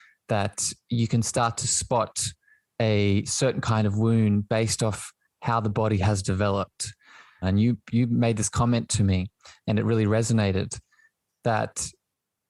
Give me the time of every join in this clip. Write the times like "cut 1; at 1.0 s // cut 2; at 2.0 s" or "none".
cut 1; at 7.4 s